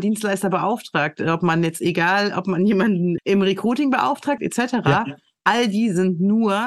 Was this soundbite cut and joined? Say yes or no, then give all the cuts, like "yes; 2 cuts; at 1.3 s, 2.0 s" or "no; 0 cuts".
yes; 2 cuts; at 3.2 s, 4.4 s